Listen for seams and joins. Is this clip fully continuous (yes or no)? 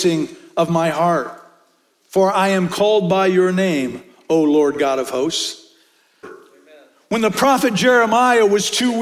no